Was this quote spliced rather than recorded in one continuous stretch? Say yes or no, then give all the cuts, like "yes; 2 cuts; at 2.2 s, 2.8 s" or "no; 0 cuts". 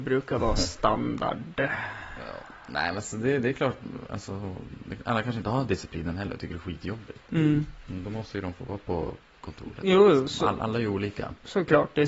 no; 0 cuts